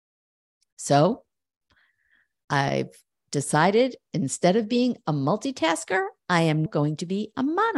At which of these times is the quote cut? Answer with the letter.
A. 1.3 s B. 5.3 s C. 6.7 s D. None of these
C